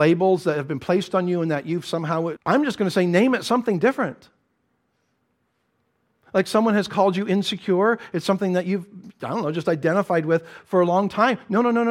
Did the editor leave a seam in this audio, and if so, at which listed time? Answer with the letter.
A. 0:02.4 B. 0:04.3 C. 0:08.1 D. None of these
A